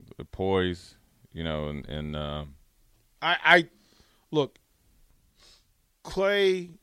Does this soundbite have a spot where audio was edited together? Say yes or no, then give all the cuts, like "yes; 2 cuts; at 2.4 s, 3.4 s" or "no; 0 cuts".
no; 0 cuts